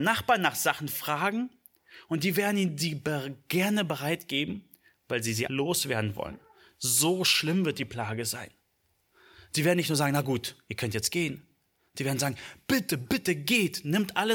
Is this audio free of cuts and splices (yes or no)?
no